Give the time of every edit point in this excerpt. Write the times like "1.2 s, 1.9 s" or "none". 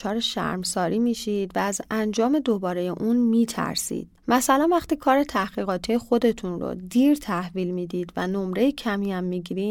4.2 s